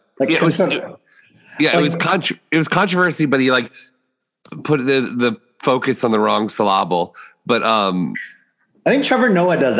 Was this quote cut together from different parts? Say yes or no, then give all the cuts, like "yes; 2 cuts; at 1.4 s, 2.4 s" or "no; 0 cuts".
no; 0 cuts